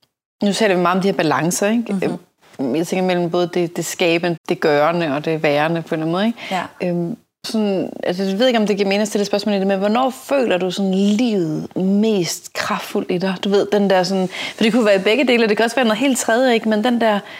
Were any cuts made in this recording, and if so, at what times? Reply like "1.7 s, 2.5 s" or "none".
4.4 s, 7.4 s